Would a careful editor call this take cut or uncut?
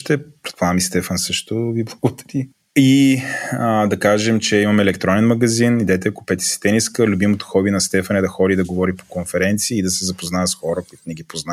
uncut